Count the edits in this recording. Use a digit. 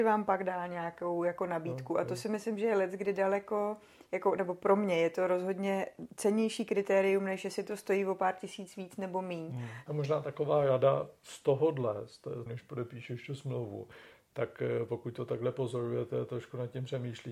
2